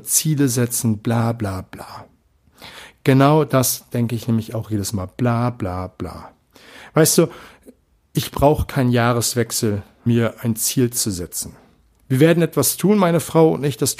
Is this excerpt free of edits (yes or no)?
no